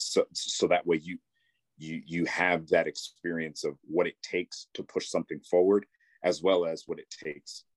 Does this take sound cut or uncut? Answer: uncut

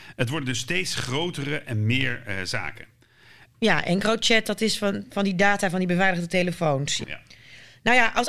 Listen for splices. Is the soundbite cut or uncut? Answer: cut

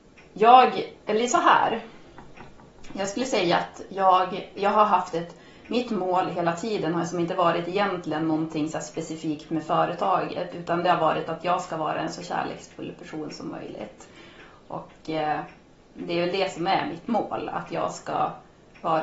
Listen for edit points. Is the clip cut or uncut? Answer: uncut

